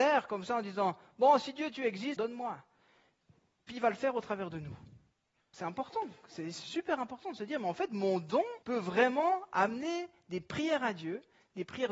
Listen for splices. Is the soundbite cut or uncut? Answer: cut